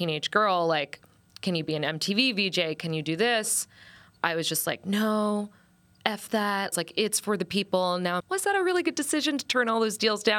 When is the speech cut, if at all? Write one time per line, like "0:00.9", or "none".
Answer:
0:06.7
0:08.2